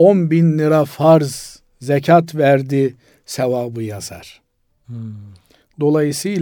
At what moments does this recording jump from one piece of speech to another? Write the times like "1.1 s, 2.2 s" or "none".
4.7 s